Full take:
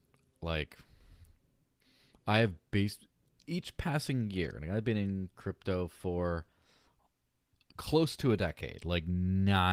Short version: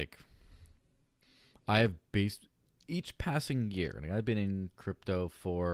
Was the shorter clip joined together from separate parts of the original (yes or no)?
no